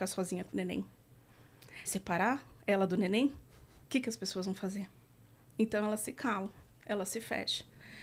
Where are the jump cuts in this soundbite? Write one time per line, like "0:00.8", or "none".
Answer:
0:01.9